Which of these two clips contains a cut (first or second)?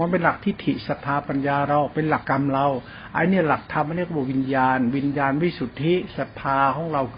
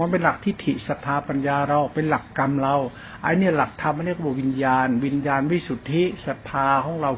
first